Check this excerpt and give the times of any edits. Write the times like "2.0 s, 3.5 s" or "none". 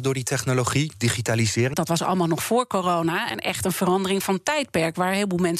1.7 s, 3.3 s